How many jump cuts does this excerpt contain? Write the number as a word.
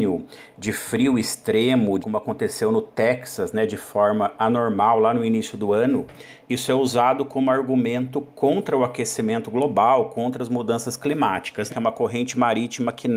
three